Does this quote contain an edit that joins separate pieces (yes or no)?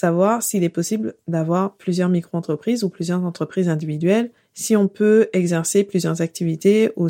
no